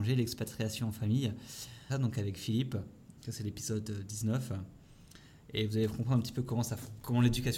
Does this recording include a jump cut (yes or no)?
yes